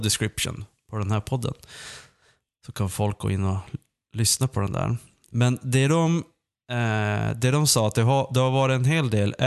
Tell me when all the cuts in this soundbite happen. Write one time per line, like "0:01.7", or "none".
none